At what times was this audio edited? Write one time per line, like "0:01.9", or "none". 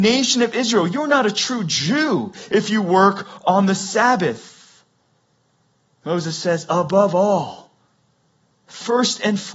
none